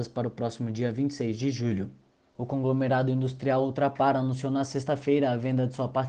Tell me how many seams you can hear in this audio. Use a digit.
1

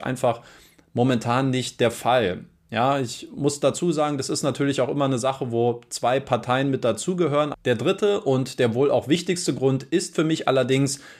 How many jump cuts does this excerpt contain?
1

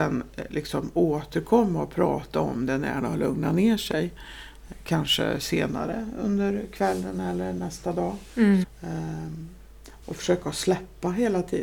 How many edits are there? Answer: 2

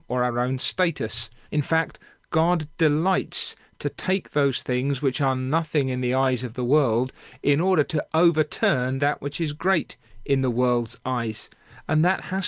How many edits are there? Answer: 1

